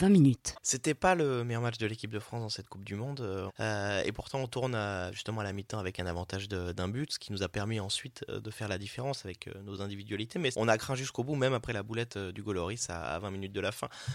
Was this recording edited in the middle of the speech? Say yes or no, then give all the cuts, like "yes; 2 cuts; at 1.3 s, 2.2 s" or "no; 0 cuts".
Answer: yes; 1 cut; at 3.5 s